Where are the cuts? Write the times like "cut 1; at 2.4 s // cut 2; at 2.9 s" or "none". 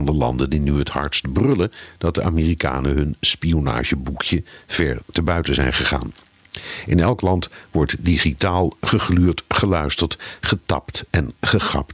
none